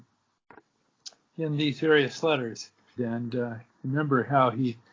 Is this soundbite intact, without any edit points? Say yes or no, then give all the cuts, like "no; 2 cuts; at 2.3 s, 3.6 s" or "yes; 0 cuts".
no; 1 cut; at 3.0 s